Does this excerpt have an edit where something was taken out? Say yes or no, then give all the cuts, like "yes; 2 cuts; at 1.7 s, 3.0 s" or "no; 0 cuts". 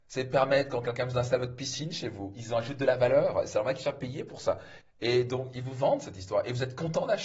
yes; 1 cut; at 4.8 s